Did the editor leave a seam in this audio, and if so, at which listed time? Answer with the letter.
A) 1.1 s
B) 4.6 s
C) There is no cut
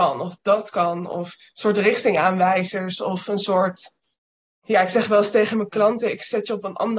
B